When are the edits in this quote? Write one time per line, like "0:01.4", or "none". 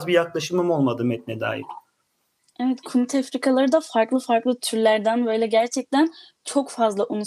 none